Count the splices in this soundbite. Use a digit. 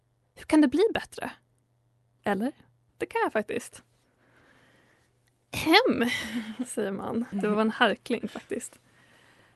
2